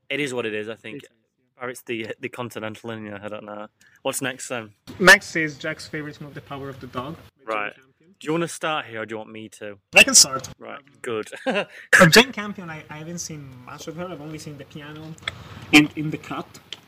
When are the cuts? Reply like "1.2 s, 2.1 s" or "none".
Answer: 6.3 s